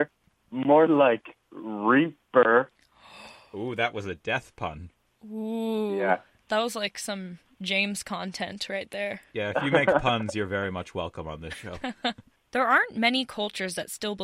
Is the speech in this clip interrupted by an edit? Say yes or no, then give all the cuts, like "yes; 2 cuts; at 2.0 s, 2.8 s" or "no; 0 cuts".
no; 0 cuts